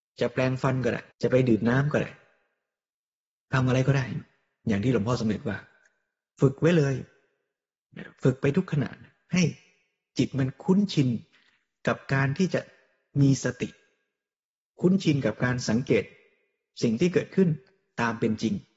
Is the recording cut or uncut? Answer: cut